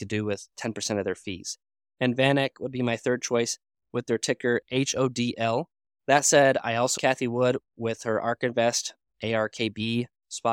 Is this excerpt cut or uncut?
cut